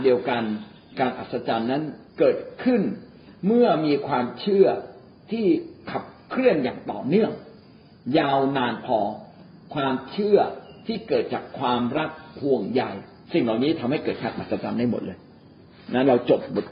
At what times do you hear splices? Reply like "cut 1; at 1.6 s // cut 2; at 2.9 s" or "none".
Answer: cut 1; at 2.1 s